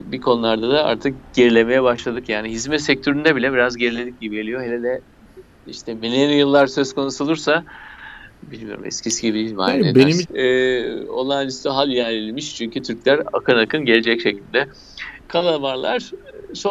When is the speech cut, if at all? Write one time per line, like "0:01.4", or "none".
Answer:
0:10.2
0:15.3